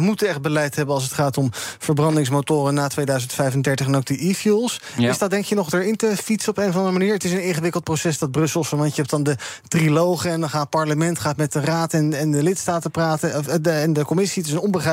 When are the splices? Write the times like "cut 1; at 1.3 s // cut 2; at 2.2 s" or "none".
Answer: none